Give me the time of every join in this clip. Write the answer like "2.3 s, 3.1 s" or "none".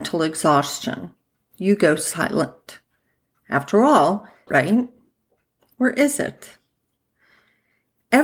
4.5 s